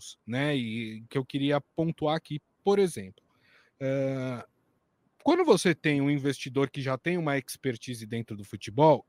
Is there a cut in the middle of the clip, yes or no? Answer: no